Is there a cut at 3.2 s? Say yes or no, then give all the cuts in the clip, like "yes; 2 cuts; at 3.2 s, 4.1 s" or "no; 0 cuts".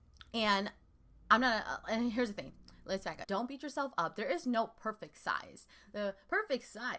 yes; 1 cut; at 3.2 s